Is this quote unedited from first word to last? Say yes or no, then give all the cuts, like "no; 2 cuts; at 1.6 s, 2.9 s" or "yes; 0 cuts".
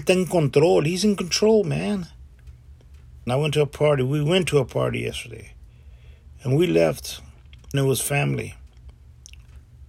no; 2 cuts; at 3.3 s, 7.7 s